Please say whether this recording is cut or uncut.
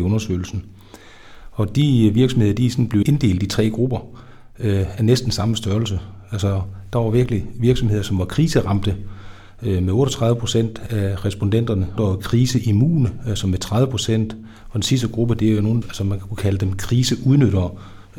cut